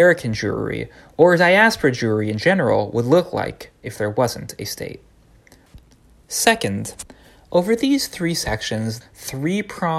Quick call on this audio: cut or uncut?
cut